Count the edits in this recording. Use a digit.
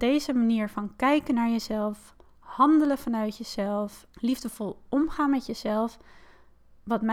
1